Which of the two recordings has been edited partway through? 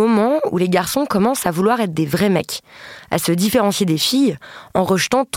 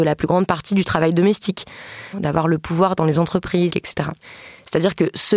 second; 2 cuts; at 2.1 s, 3.7 s

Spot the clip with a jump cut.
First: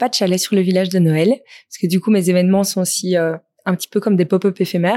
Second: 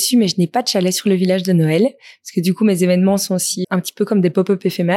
second; 1 cut; at 3.6 s

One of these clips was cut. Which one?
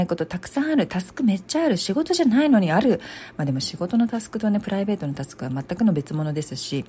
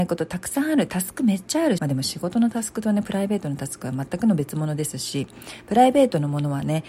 second; 1 cut; at 1.8 s

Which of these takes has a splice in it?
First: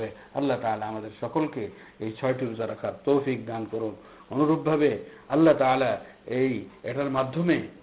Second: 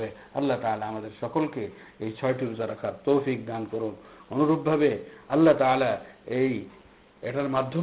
first; 1 cut; at 6.8 s

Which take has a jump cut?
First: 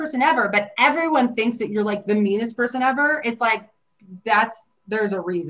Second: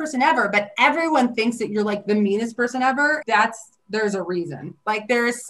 second; 1 cut; at 3.2 s

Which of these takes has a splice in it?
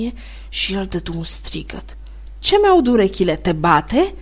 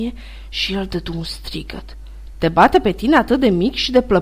second; 1 cut; at 2.3 s

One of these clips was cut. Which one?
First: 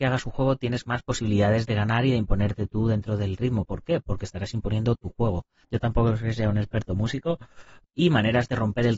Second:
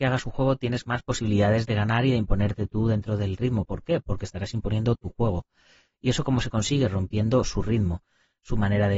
first; 2 cuts; at 5.6 s, 7.8 s

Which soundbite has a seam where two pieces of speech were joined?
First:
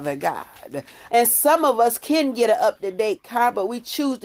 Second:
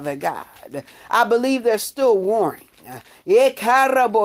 first; 1 cut; at 1.1 s

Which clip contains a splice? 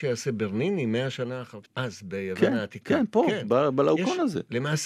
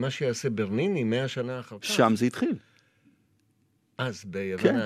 first; 1 cut; at 1.6 s

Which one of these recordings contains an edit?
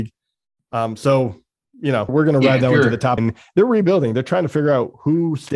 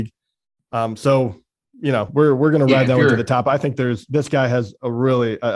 first; 2 cuts; at 2.1 s, 3.2 s

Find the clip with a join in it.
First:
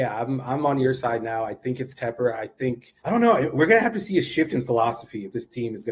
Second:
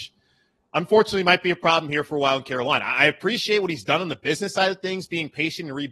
first; 1 cut; at 3.0 s

